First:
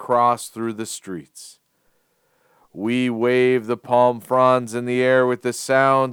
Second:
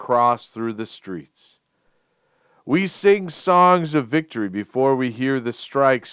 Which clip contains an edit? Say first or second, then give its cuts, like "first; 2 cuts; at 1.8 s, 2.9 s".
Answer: first; 1 cut; at 2.6 s